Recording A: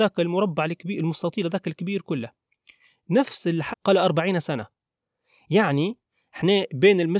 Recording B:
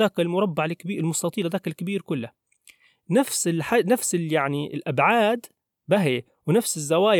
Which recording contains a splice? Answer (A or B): A